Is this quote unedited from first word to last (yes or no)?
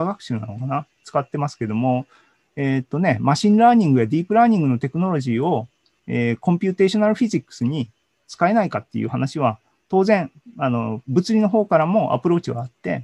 yes